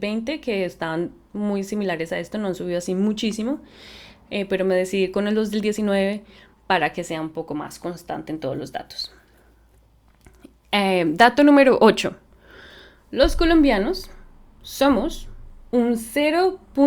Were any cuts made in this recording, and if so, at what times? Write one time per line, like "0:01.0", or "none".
none